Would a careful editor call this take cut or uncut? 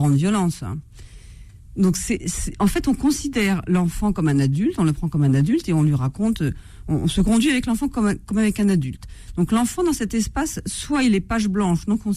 uncut